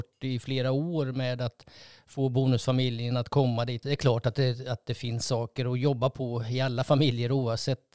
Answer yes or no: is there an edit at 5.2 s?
no